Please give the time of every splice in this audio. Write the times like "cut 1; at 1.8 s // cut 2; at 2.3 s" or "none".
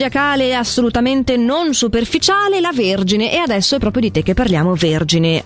none